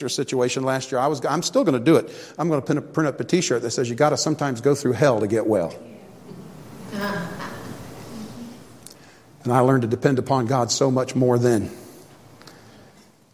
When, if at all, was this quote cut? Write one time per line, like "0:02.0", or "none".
none